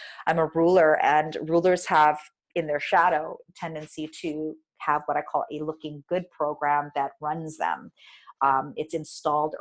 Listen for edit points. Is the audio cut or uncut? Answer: uncut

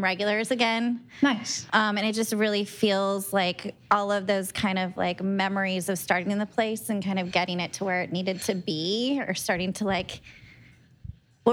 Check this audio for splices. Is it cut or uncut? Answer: cut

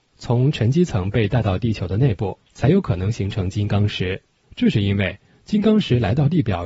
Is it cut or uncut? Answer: cut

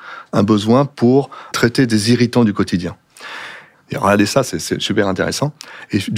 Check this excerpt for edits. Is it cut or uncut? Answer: cut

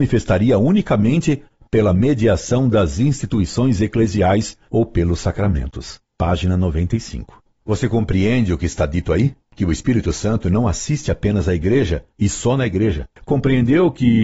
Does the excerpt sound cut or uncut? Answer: cut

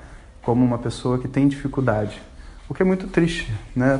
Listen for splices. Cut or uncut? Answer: uncut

